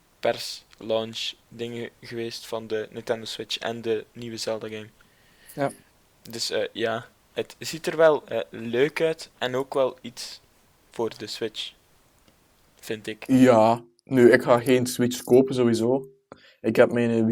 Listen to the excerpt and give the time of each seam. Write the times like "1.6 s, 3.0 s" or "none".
none